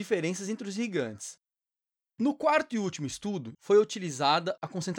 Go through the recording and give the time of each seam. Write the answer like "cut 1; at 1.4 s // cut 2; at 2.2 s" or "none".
cut 1; at 1.9 s // cut 2; at 3.6 s